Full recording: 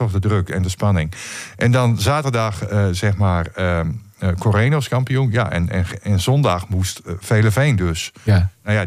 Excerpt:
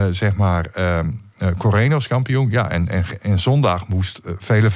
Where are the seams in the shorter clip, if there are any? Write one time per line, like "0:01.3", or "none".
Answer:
none